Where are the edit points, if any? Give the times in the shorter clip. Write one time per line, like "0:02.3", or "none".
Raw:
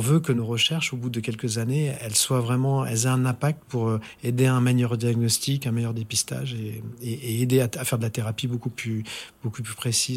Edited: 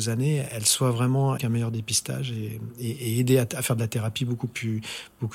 0:01.4